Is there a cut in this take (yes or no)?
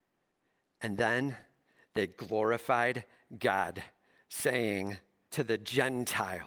yes